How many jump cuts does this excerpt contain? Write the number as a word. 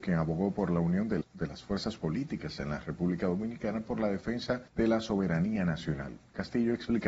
two